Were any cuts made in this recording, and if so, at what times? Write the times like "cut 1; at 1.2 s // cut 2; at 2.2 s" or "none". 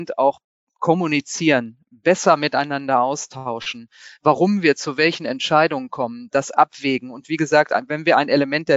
none

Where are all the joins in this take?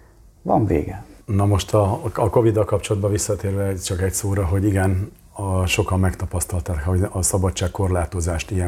cut 1; at 1.2 s

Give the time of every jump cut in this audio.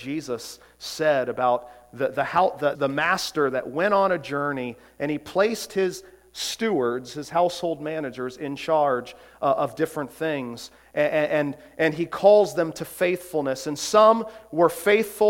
cut 1; at 2.7 s

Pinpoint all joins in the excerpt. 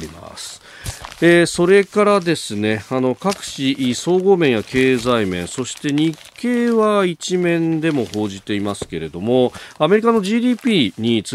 none

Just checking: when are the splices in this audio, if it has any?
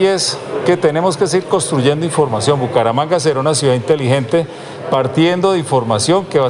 none

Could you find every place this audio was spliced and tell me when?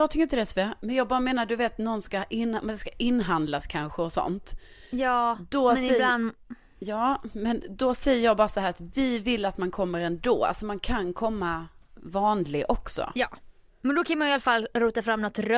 none

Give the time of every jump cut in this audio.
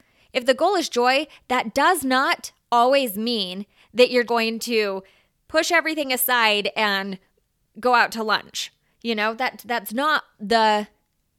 cut 1; at 4.3 s

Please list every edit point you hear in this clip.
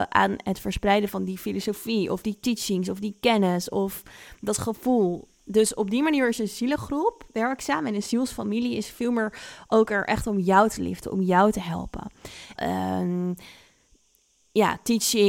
cut 1; at 12.6 s

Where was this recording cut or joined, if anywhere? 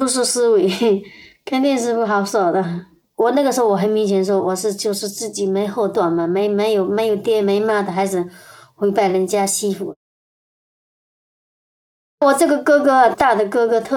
none

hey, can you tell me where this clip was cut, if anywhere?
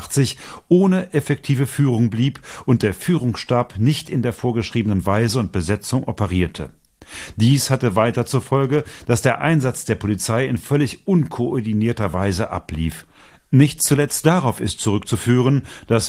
none

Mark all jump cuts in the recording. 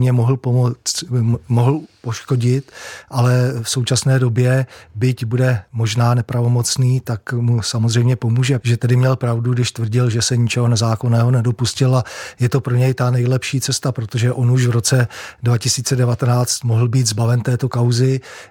cut 1; at 8.6 s

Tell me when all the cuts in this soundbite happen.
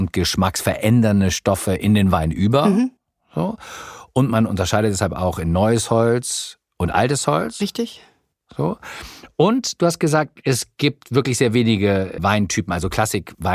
cut 1; at 12.2 s

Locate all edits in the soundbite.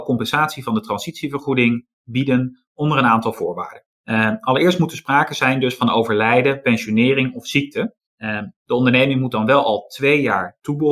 cut 1; at 3.9 s // cut 2; at 8.0 s

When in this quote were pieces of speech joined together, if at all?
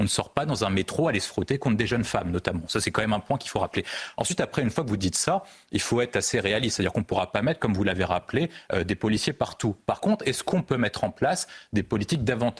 none

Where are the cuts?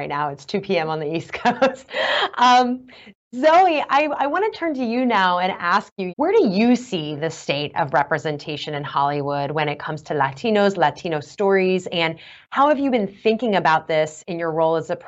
cut 1; at 6.1 s

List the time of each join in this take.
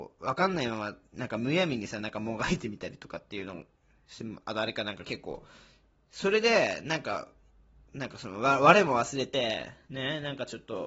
none

